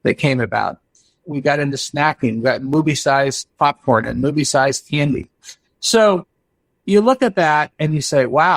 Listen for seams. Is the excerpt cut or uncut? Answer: cut